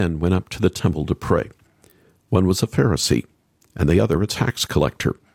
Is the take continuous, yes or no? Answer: yes